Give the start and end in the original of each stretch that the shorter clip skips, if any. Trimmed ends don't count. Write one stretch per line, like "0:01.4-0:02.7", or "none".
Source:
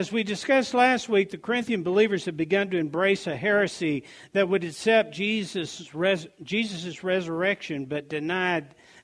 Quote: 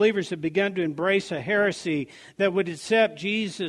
none